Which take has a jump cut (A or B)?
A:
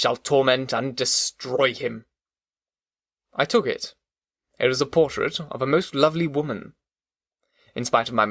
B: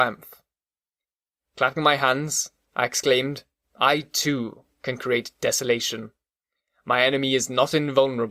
A